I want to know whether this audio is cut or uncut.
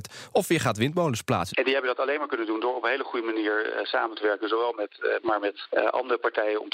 cut